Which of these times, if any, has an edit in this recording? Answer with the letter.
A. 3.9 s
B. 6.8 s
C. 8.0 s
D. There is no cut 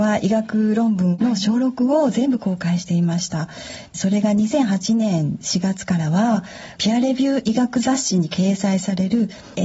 B